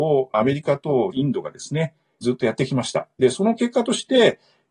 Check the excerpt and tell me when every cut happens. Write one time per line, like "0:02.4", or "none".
none